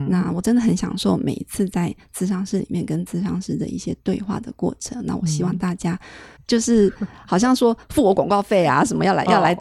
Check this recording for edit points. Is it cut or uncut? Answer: cut